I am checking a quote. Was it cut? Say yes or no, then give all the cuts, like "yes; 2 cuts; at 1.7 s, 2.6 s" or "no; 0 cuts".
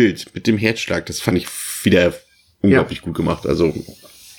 no; 0 cuts